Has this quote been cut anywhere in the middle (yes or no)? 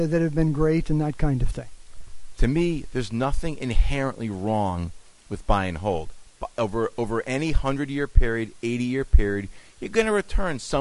yes